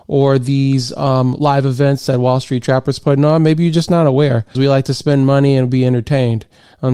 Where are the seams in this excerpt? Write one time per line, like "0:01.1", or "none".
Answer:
0:04.5